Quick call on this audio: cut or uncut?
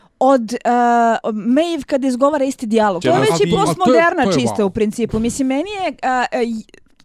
cut